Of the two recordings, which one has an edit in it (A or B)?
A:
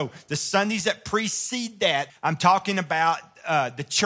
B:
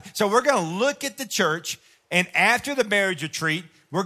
A